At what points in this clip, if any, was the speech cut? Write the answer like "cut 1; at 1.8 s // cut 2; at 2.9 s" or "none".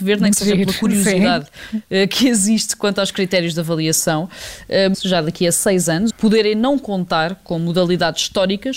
cut 1; at 4.9 s // cut 2; at 6.1 s